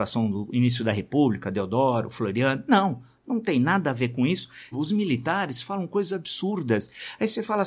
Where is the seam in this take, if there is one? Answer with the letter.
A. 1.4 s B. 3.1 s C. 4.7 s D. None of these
C